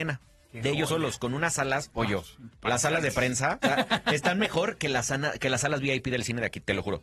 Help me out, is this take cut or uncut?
uncut